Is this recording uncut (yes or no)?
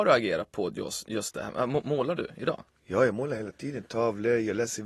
yes